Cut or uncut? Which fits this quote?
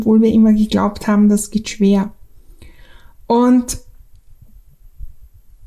uncut